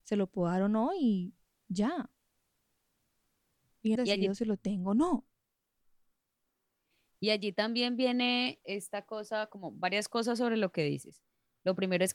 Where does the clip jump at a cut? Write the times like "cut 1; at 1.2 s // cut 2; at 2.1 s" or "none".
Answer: cut 1; at 4.0 s // cut 2; at 8.6 s